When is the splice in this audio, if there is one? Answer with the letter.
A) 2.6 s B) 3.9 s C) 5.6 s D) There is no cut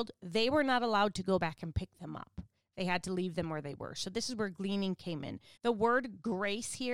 C